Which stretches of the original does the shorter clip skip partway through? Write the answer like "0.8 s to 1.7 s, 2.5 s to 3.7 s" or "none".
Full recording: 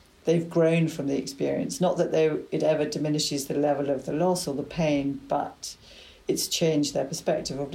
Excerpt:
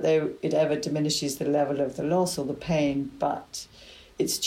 none